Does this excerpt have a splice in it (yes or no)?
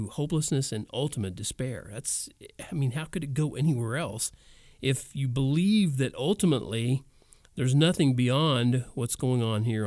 no